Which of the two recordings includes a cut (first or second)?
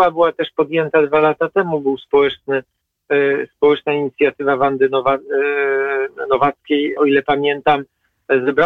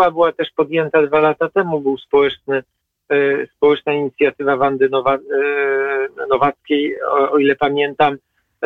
first